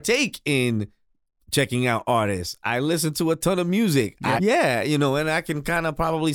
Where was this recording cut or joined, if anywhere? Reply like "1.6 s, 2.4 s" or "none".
4.4 s

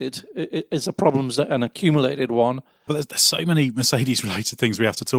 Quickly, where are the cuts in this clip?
2.9 s

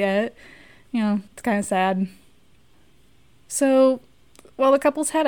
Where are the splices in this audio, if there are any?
1.3 s

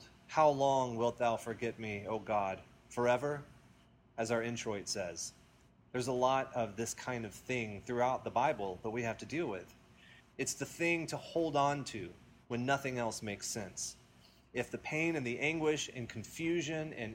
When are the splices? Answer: 10.2 s

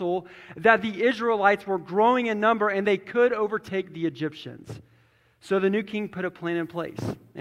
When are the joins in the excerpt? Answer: none

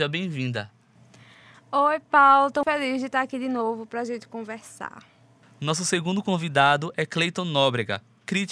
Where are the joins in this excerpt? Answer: 2.6 s

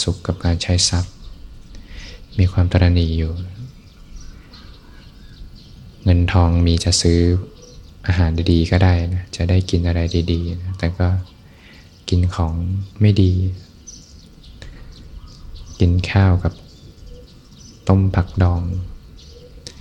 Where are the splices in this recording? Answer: 12.9 s

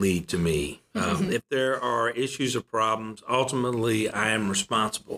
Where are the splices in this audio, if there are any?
none

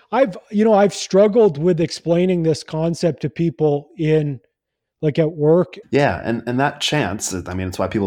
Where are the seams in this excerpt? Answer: 5.8 s

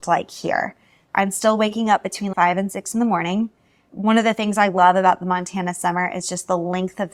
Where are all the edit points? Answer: none

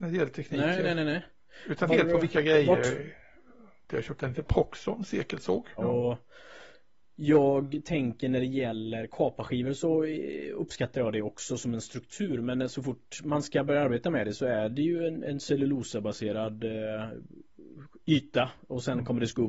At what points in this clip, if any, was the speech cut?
1.9 s, 3.9 s, 5.8 s

